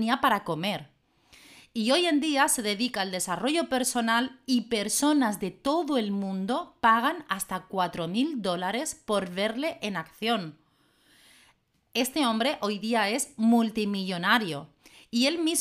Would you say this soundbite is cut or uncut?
uncut